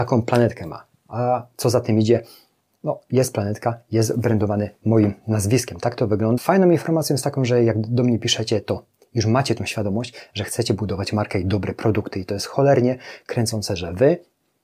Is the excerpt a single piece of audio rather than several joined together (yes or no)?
no